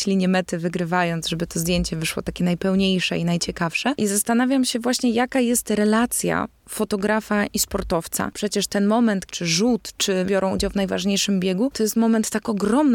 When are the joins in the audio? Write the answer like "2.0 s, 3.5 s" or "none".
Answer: 9.3 s